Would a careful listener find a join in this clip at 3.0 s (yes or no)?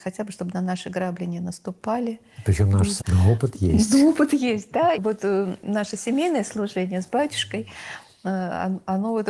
yes